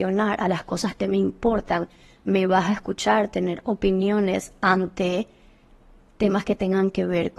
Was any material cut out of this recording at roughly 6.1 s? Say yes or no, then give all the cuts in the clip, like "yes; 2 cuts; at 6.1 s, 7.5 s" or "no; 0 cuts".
no; 1 cut; at 1.0 s